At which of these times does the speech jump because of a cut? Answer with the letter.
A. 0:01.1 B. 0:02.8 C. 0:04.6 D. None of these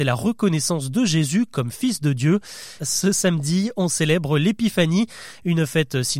B